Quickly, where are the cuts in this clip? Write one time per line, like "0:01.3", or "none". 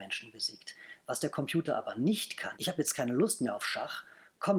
0:02.6